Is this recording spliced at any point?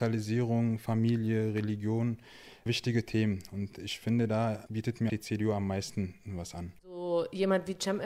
yes; 2 cuts; at 5.1 s, 6.8 s

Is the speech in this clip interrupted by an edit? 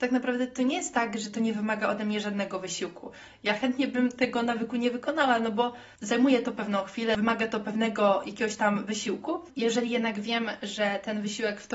no; 0 cuts

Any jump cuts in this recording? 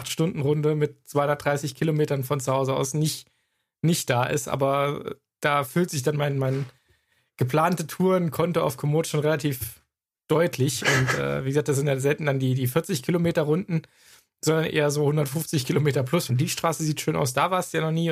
yes; 1 cut; at 16.3 s

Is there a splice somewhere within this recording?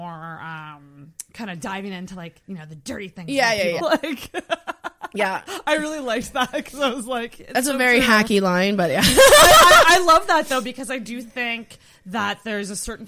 yes; 1 cut; at 3.8 s

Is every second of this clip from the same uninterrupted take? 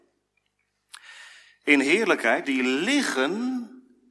no; 1 cut; at 2.4 s

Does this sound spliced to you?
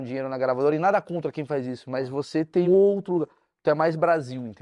yes; 1 cut; at 2.6 s

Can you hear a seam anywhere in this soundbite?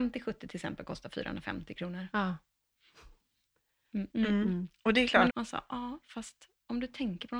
yes; 2 cuts; at 4.1 s, 5.3 s

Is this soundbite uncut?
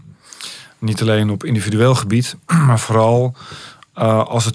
yes; 0 cuts

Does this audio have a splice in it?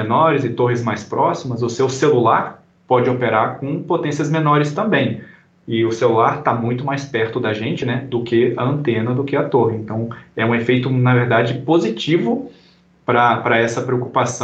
no; 0 cuts

